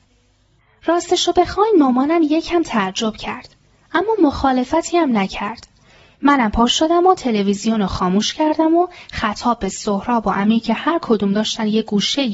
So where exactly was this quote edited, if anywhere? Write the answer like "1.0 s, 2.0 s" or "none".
none